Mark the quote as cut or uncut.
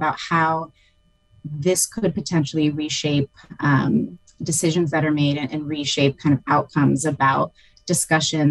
uncut